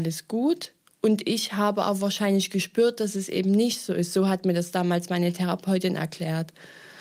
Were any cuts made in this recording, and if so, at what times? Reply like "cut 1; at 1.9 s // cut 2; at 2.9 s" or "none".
none